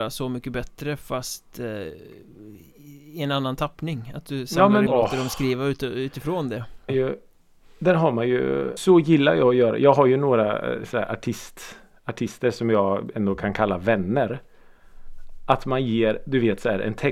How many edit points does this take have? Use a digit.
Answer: 3